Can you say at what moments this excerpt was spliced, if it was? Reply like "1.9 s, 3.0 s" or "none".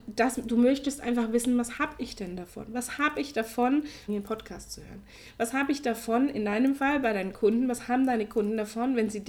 4.1 s